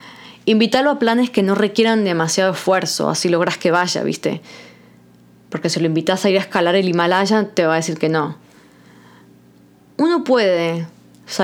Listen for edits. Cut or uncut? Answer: uncut